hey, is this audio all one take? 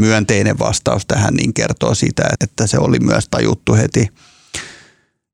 no; 1 cut; at 2.4 s

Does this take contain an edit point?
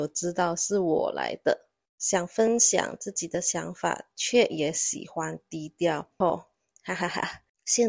yes; 1 cut; at 6.2 s

